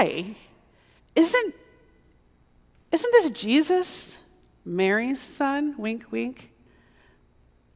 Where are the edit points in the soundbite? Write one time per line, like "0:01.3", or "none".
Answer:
0:01.0